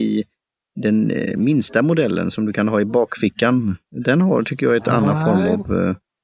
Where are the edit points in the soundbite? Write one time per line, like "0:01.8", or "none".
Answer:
0:03.8